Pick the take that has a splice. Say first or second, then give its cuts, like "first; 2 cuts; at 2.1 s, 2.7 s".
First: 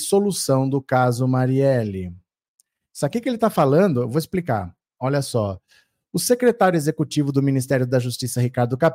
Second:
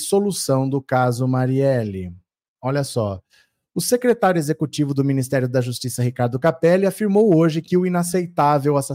second; 1 cut; at 2.5 s